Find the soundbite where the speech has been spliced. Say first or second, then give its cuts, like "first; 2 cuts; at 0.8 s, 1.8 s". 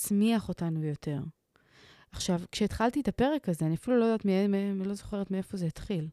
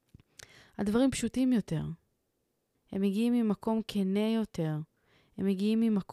second; 1 cut; at 2.7 s